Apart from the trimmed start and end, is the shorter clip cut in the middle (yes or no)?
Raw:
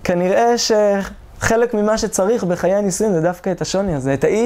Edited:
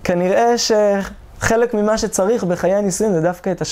no